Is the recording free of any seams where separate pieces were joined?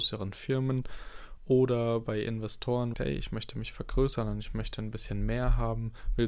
no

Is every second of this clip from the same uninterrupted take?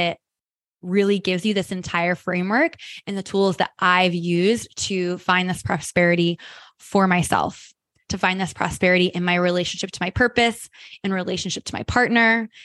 yes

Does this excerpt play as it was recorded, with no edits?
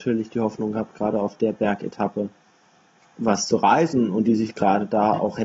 yes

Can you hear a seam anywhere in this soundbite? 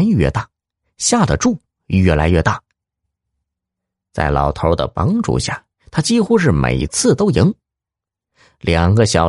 no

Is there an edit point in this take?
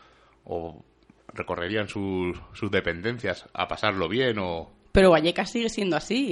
no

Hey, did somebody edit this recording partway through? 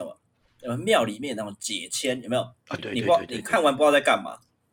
yes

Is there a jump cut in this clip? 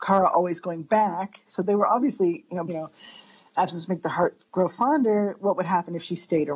yes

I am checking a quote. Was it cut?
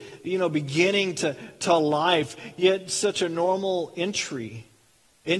no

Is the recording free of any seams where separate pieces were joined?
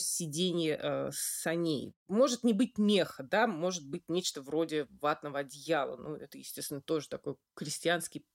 no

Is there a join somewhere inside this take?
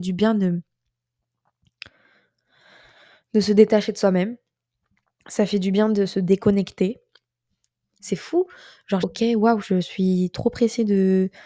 yes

